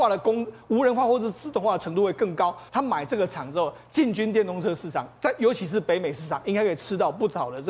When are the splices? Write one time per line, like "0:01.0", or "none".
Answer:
0:02.7